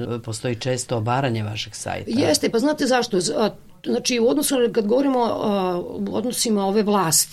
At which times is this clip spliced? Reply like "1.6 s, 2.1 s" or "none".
none